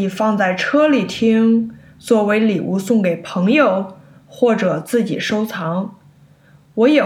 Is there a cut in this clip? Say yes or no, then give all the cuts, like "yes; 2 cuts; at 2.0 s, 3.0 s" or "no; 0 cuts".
no; 0 cuts